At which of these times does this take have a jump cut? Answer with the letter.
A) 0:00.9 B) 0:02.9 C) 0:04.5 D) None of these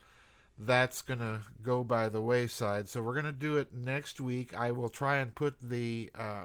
D